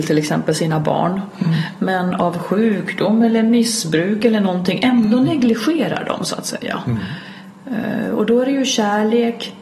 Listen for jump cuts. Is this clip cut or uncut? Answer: uncut